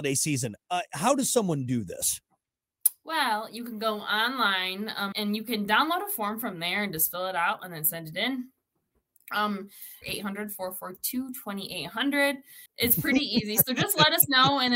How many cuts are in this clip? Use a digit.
3